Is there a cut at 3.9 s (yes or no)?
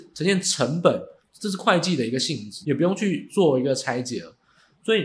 no